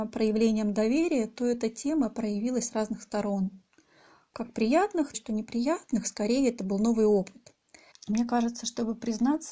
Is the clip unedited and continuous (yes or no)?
no